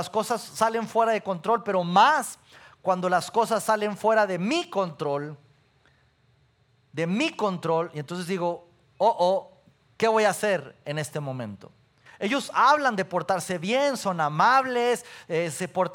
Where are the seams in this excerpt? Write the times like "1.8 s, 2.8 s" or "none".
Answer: 12.1 s